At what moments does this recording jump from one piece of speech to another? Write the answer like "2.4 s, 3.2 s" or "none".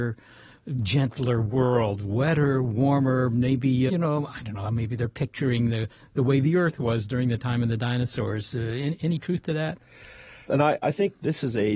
3.9 s, 10.5 s